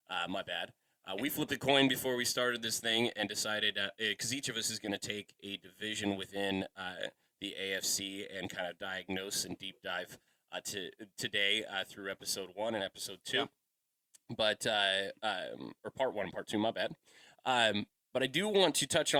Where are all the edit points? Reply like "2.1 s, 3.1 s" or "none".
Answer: none